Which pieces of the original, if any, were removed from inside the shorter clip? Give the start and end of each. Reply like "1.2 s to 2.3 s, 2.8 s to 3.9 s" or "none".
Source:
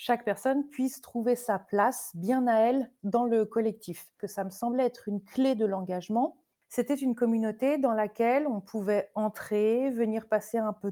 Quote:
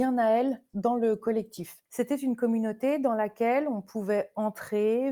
4.1 s to 6.6 s